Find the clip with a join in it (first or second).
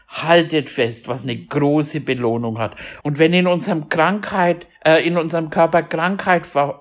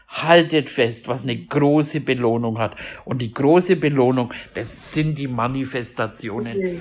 first